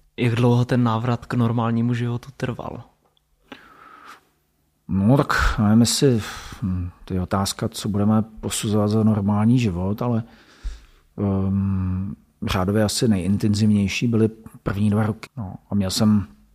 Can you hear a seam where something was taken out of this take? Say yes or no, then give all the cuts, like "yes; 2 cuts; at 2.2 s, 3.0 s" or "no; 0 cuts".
yes; 1 cut; at 15.3 s